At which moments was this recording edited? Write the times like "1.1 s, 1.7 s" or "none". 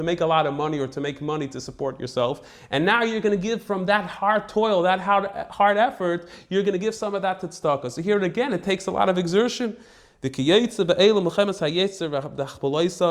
none